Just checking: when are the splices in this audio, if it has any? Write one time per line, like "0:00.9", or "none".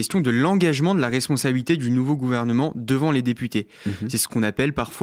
none